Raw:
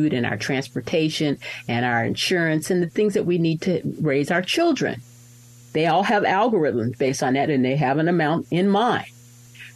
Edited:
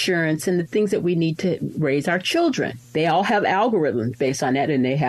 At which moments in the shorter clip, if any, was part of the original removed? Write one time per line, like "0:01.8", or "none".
0:02.8